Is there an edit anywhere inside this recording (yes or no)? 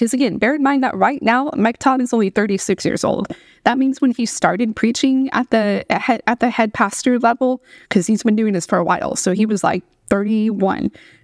yes